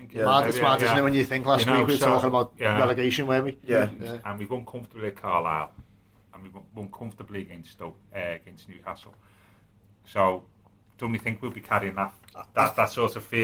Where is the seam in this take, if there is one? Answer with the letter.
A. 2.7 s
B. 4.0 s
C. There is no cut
B